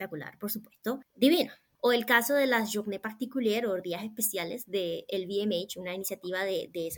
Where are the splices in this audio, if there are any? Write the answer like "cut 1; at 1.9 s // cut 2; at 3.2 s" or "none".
cut 1; at 1.0 s